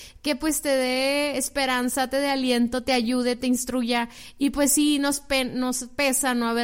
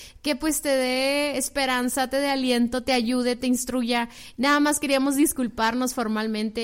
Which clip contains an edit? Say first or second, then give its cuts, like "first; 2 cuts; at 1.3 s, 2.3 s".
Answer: second; 1 cut; at 4.3 s